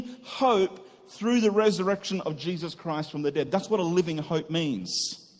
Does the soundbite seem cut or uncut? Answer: uncut